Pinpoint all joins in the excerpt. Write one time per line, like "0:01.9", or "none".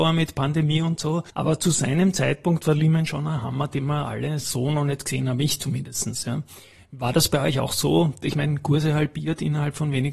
0:01.3